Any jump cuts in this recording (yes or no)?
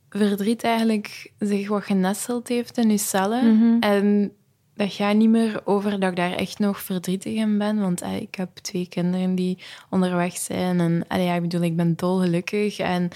no